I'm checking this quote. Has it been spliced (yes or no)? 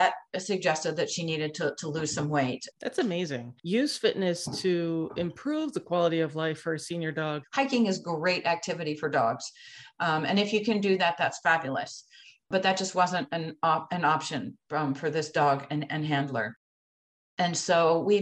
yes